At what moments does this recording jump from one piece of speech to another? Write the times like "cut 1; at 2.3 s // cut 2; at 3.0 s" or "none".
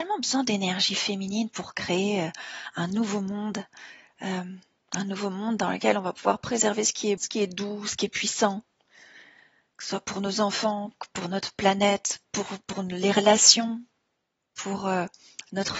cut 1; at 7.2 s // cut 2; at 12.3 s

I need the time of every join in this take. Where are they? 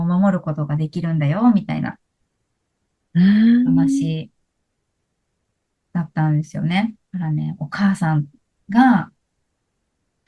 cut 1; at 7.1 s

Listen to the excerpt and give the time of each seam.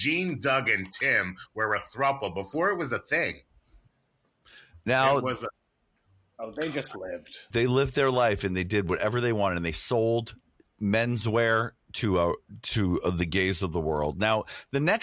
cut 1; at 7.5 s

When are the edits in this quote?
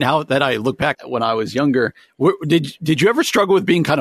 cut 1; at 0.9 s

